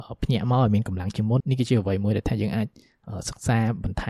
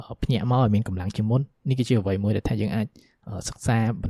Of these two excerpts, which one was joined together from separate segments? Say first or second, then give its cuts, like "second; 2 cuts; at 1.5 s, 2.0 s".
first; 1 cut; at 1.4 s